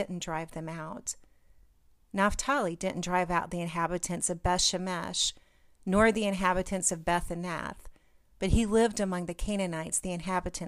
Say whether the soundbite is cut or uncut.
uncut